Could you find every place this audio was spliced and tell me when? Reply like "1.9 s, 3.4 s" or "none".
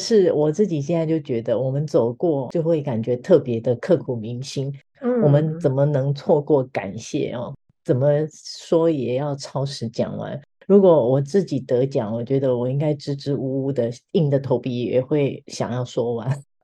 4.9 s